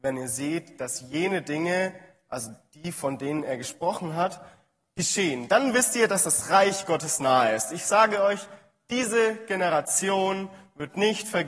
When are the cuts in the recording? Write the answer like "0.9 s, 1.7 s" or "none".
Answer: none